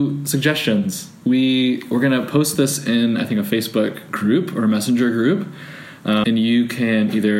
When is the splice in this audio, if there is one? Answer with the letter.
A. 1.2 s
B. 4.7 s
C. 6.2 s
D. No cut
C